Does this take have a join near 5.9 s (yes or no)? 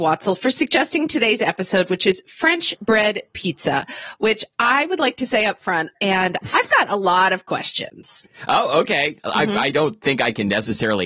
yes